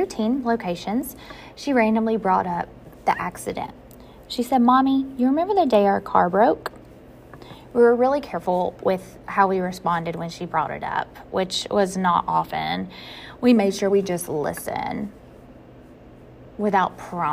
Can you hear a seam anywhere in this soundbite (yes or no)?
no